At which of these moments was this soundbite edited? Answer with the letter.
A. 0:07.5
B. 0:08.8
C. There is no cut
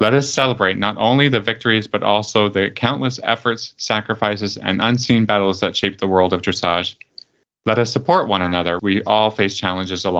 B